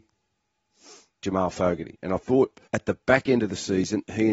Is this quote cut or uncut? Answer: cut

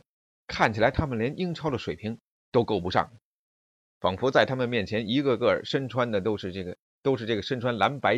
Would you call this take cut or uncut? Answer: uncut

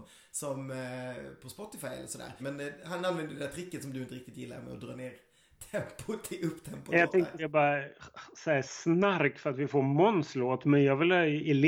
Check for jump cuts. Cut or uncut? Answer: cut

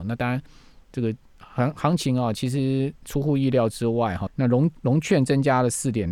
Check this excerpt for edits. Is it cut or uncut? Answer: cut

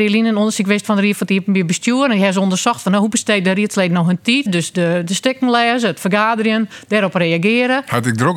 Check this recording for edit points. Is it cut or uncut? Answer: cut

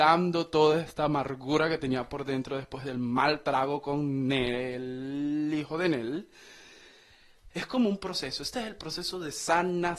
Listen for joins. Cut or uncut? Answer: cut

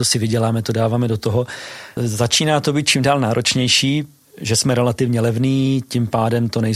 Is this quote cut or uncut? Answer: cut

